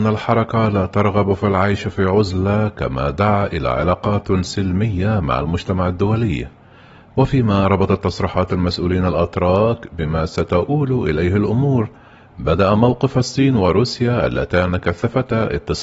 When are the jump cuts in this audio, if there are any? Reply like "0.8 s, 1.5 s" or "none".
none